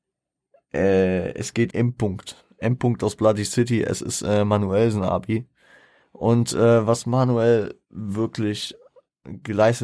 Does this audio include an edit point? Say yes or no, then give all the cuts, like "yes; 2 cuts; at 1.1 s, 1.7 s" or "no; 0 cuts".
yes; 1 cut; at 1.7 s